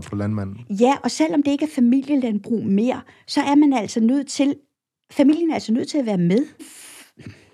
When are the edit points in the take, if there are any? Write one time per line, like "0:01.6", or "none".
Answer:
0:06.6